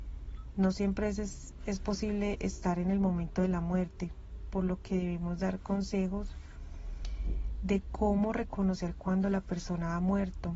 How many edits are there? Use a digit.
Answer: 0